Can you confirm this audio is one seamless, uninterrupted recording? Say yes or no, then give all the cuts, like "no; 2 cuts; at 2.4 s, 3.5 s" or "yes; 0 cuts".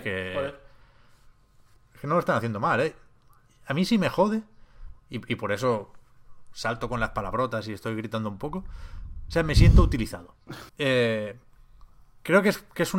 no; 1 cut; at 10.7 s